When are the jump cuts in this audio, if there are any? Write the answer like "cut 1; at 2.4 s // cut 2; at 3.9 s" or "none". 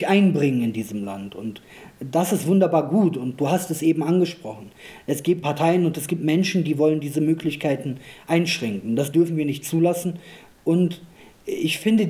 cut 1; at 5.4 s // cut 2; at 10.6 s